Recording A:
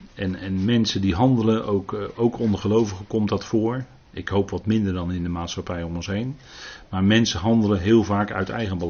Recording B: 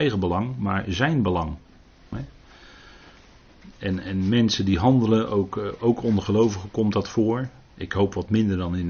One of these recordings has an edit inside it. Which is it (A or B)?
B